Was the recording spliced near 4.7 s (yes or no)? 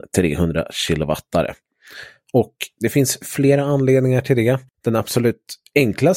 yes